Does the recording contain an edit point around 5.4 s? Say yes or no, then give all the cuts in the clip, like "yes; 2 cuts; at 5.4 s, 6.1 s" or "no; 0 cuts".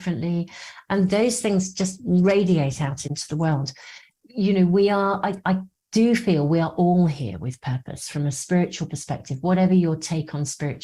no; 0 cuts